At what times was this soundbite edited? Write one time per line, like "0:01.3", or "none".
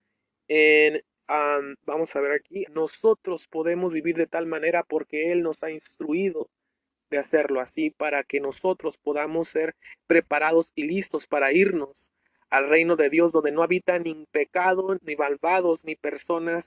0:02.7
0:15.0